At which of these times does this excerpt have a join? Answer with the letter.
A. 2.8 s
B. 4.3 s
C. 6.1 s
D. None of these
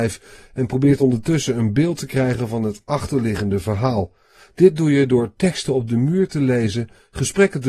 D